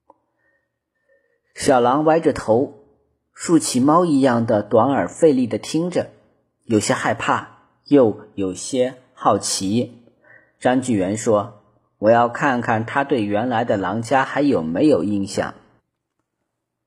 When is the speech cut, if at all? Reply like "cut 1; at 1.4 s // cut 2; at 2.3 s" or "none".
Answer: none